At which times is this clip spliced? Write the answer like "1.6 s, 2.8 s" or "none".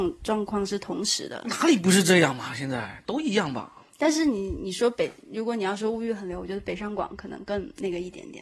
none